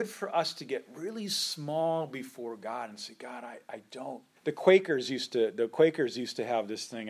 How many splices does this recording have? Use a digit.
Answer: 1